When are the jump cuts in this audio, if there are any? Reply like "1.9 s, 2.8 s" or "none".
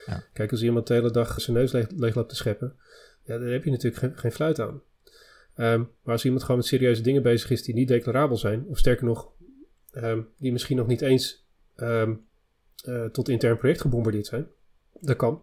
1.4 s